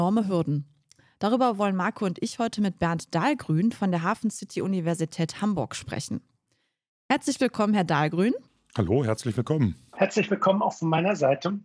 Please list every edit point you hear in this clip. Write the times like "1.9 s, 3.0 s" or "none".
none

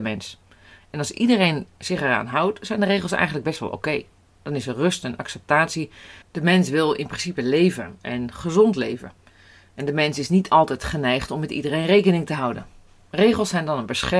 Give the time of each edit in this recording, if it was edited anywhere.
6.2 s

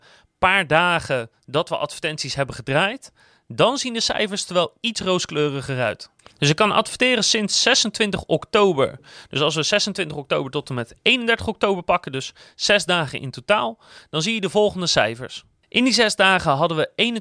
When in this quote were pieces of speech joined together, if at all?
none

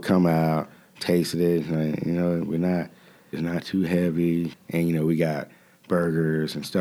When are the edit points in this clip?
3.3 s, 4.5 s

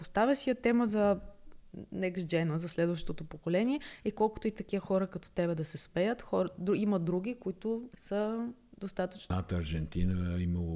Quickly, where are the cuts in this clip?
9.3 s

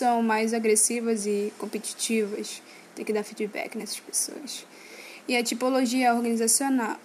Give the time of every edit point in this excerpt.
5.2 s

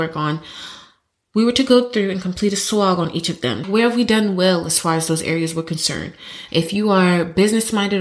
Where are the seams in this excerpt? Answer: 3.6 s, 6.5 s

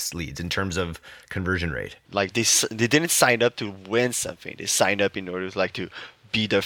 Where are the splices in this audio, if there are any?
2.1 s

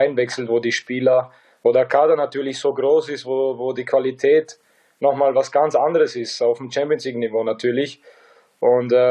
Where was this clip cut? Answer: none

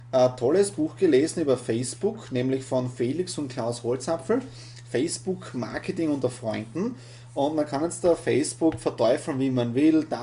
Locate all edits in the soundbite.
none

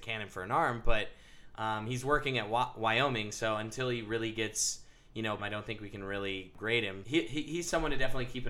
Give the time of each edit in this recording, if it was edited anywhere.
5.4 s, 7.0 s

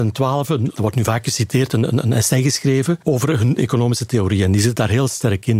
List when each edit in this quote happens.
none

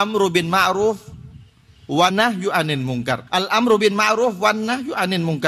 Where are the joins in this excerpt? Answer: 2.1 s, 3.3 s

